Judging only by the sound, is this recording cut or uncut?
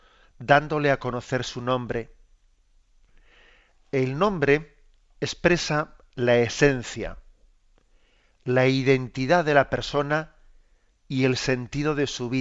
uncut